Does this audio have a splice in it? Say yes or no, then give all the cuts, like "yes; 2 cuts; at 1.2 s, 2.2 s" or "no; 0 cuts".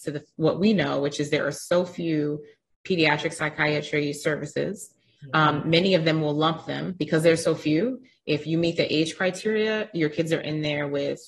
no; 0 cuts